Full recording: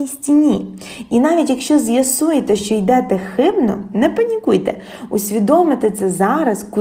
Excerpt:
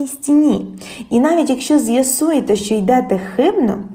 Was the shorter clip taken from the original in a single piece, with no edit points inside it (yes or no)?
yes